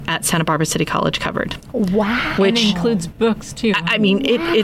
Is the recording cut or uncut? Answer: uncut